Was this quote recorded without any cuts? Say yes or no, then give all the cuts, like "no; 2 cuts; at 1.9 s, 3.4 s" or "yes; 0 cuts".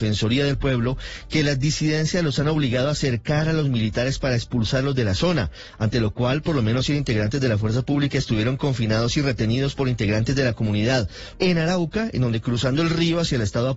no; 1 cut; at 11.3 s